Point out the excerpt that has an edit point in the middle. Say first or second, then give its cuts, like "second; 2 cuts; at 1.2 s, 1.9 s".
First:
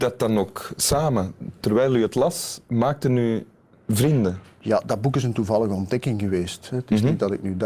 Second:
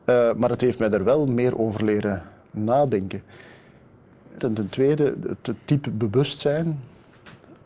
second; 1 cut; at 4.4 s